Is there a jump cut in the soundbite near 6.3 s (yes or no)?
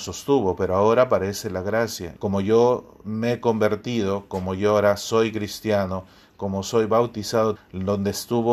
no